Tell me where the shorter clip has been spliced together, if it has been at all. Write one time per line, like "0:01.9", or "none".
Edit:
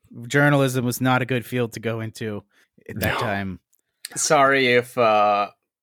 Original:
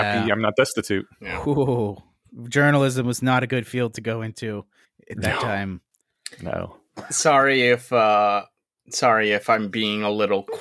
0:04.1

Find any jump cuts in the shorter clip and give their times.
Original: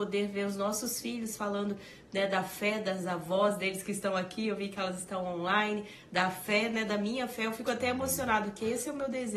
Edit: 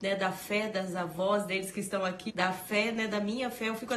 0:02.3

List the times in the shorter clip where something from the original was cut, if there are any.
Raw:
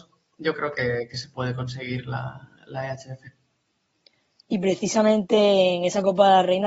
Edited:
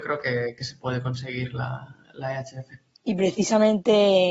0:02.9

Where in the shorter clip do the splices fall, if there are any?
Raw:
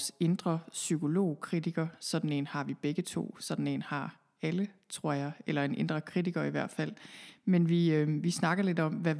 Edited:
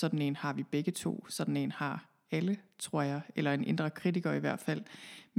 none

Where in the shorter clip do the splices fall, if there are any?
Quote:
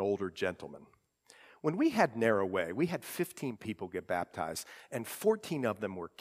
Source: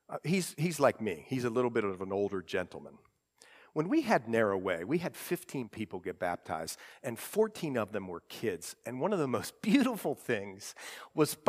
none

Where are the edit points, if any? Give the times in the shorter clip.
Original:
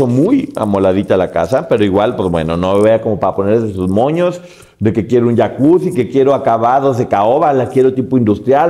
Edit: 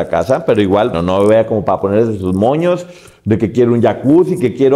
0:00.9

